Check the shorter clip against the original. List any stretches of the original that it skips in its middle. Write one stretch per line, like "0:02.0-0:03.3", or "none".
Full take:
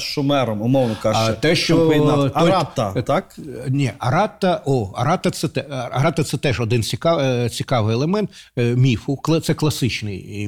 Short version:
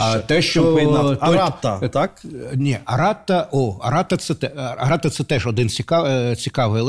none